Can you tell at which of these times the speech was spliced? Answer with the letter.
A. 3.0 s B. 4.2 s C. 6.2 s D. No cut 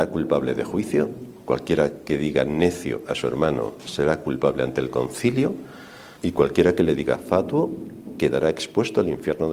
C